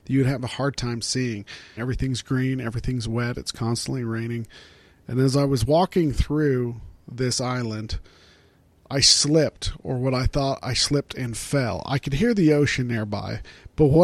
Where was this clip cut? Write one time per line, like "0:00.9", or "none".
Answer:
0:01.8